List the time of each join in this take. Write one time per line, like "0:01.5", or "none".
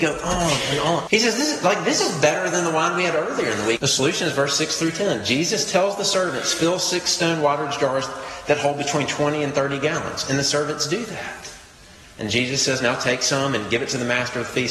0:01.1
0:03.8